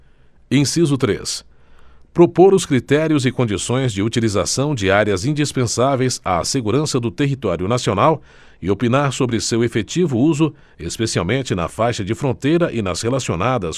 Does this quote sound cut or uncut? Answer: uncut